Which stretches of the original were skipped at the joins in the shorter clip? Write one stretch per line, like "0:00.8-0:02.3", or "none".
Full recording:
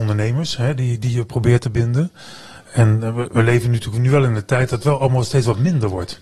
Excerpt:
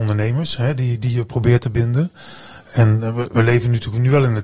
none